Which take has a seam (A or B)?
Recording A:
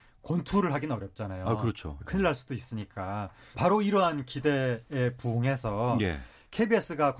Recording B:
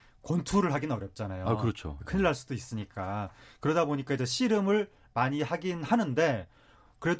A